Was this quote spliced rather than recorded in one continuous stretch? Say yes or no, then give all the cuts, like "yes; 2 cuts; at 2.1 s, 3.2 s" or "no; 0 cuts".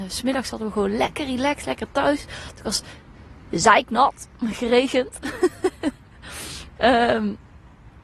no; 0 cuts